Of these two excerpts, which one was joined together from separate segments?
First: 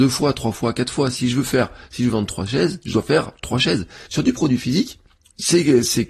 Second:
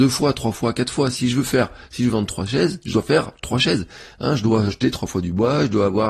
first; 1 cut; at 4.1 s

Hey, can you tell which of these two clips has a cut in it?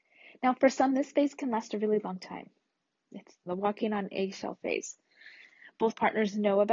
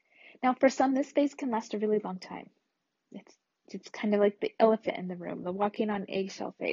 first; 1 cut; at 3.5 s

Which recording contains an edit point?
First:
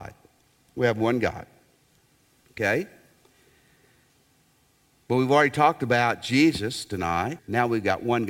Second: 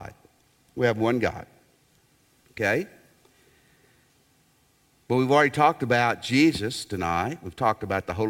first; 1 cut; at 7.4 s

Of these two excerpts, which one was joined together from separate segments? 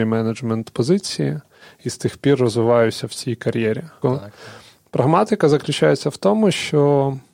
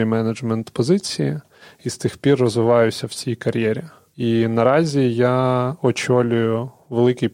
first; 1 cut; at 4.0 s

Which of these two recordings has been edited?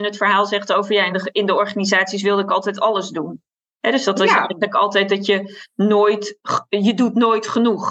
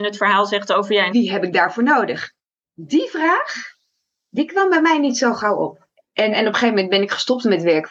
second; 2 cuts; at 1.1 s, 6.3 s

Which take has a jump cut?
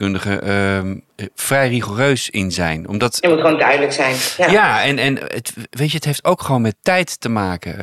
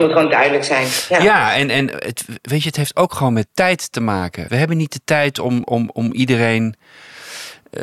second; 2 cuts; at 4.5 s, 5.6 s

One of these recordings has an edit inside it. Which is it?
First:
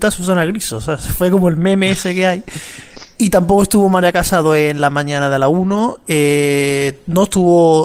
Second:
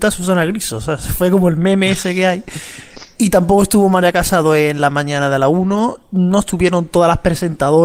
second; 1 cut; at 6.0 s

